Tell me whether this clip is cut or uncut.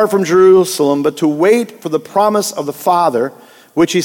uncut